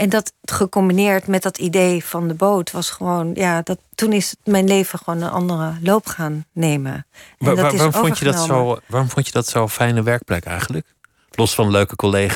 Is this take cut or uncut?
uncut